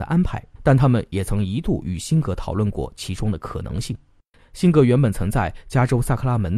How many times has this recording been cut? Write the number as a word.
one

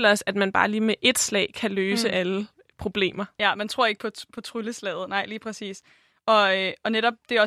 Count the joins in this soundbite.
zero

